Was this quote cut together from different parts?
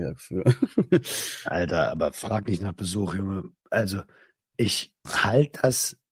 no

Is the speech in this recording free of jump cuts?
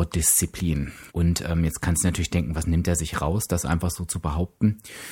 no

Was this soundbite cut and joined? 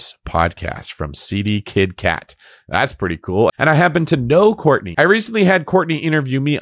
yes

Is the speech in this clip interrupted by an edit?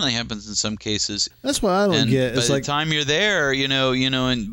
yes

